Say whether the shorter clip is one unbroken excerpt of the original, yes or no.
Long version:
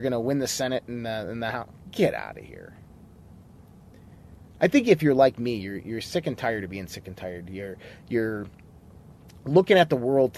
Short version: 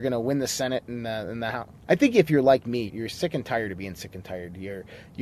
no